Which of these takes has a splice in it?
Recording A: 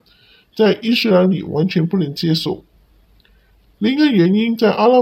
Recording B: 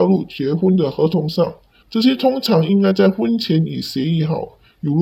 B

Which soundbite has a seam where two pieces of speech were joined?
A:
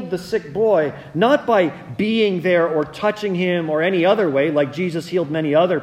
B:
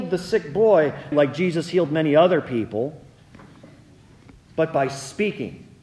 B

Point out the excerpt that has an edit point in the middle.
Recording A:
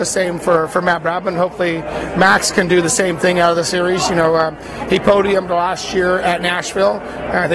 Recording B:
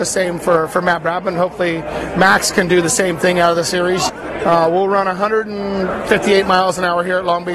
B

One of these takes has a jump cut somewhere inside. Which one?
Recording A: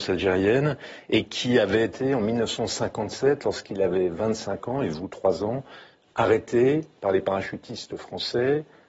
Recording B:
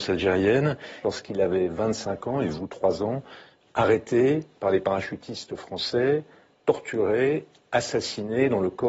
B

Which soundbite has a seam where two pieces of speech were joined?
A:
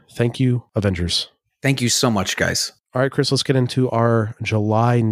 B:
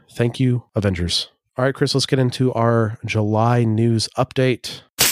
B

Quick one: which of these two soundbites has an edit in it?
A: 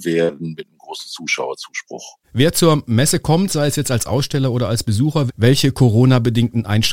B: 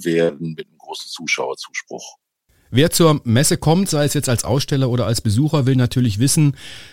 A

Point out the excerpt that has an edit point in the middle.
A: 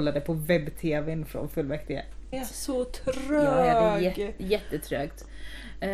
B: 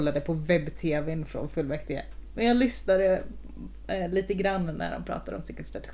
A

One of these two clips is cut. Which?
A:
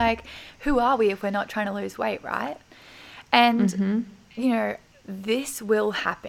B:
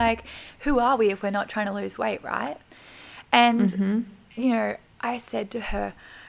A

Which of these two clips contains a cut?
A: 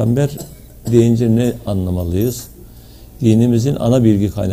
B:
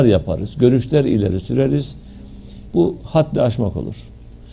B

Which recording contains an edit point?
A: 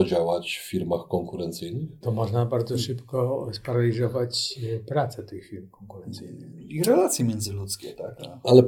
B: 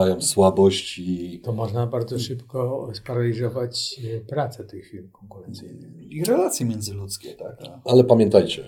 A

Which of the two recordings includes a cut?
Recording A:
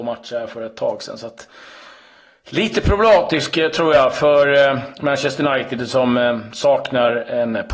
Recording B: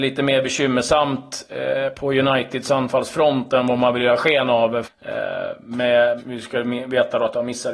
B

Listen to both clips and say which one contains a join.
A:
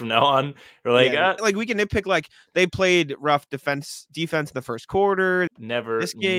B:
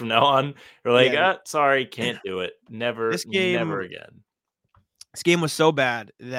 A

